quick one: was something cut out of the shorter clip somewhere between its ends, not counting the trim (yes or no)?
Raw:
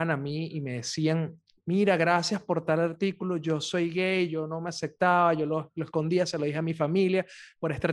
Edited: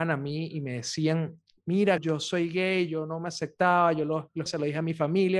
yes